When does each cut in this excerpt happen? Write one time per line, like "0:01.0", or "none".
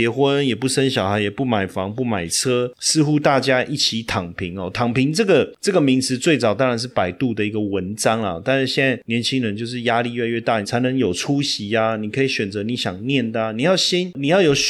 0:10.6